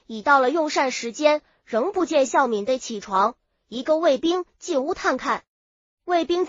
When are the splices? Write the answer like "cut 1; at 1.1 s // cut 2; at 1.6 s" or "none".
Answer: none